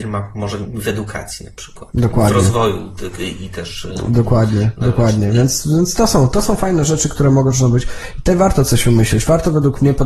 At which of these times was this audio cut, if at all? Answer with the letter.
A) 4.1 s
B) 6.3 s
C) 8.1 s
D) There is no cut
D